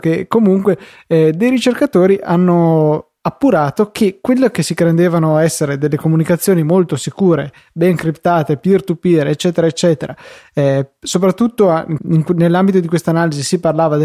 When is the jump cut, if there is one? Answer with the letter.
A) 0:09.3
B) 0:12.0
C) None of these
B